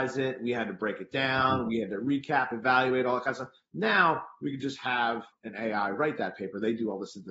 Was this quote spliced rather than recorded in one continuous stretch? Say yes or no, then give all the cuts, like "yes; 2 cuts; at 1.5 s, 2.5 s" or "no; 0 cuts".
no; 0 cuts